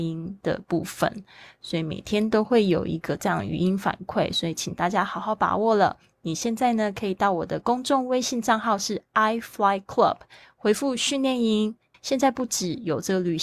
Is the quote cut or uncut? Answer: cut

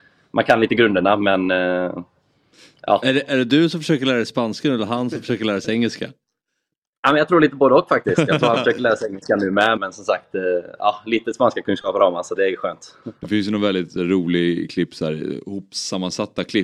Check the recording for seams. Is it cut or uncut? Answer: cut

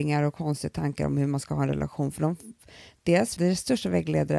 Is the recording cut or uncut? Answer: cut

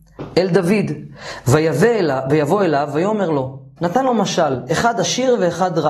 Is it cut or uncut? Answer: cut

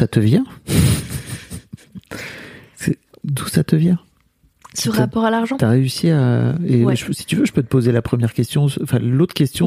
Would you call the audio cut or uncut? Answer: uncut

